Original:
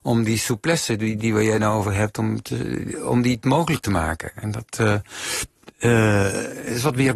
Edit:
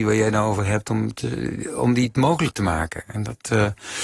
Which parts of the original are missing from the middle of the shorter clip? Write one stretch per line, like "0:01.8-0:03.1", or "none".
none